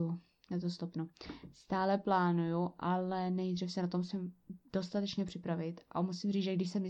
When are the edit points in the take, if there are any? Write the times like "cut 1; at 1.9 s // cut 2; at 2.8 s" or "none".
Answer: none

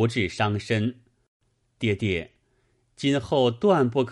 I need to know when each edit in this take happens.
cut 1; at 1.6 s

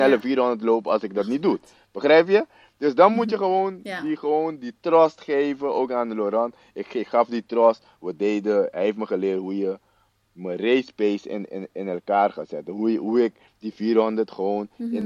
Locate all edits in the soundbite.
none

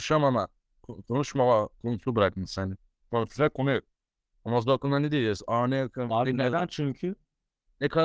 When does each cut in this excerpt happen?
none

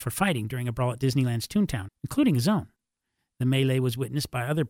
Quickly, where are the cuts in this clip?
cut 1; at 1.9 s

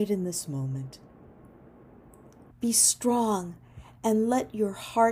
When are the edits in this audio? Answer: cut 1; at 2.5 s

